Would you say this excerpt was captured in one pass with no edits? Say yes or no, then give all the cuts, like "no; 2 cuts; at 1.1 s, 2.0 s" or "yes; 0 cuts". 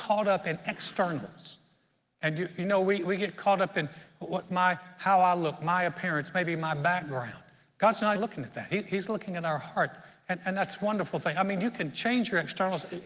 no; 1 cut; at 8.1 s